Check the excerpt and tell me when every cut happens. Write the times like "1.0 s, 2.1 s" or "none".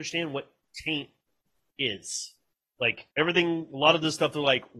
3.1 s